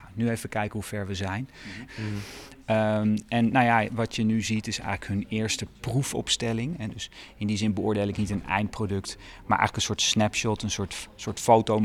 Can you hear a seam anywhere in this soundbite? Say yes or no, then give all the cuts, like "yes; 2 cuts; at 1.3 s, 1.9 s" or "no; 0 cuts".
yes; 1 cut; at 1.9 s